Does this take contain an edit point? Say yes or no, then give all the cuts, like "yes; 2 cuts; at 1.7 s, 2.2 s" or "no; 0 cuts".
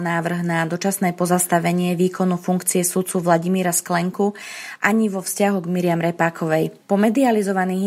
no; 0 cuts